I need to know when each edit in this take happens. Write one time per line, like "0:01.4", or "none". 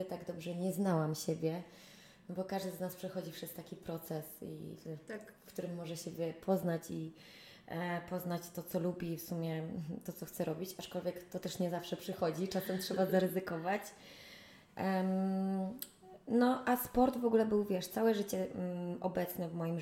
none

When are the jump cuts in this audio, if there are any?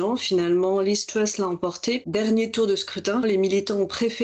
0:03.2

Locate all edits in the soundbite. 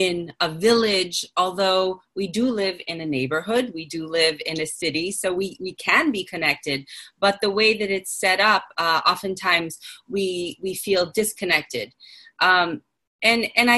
none

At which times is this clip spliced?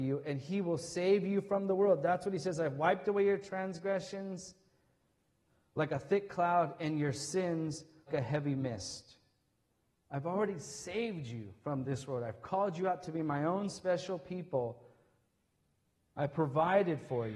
0:08.1

